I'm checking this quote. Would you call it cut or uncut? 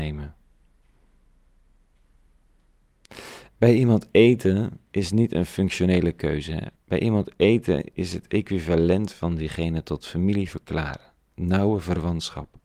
cut